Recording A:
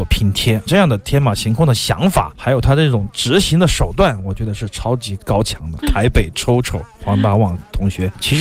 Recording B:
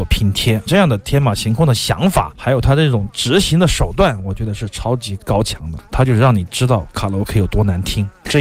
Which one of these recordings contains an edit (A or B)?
A